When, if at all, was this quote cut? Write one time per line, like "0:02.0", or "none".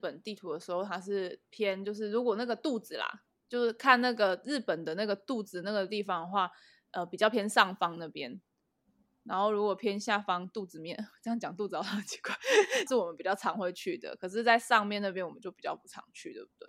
0:12.9